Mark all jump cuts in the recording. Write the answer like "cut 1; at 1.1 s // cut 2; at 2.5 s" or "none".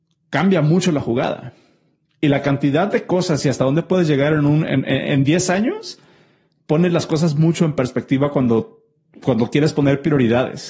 none